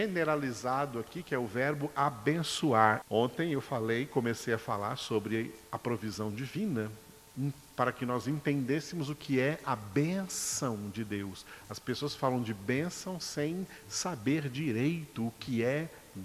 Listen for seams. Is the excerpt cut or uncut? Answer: cut